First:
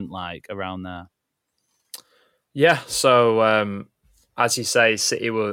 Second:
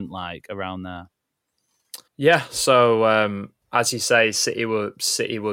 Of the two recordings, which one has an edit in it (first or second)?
second